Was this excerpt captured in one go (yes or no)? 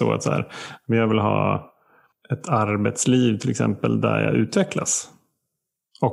yes